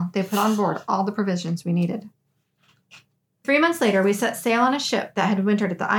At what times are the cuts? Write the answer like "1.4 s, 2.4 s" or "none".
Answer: none